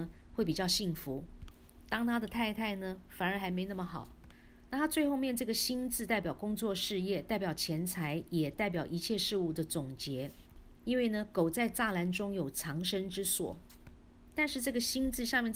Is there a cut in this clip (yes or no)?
yes